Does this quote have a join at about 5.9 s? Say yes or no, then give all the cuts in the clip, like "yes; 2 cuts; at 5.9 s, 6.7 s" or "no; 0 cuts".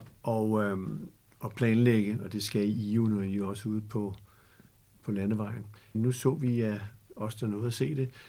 yes; 1 cut; at 5.9 s